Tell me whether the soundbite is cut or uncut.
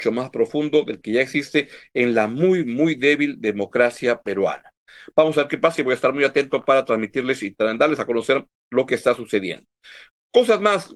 uncut